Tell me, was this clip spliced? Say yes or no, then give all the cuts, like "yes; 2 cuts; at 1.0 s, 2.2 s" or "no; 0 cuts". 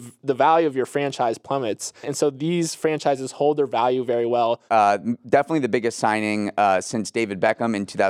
yes; 2 cuts; at 2.0 s, 4.7 s